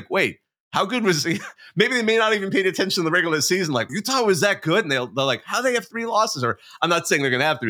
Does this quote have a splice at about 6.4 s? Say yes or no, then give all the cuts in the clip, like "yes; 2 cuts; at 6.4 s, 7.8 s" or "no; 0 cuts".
no; 1 cut; at 3.9 s